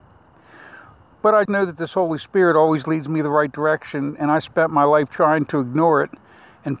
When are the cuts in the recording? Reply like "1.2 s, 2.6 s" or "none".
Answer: 1.5 s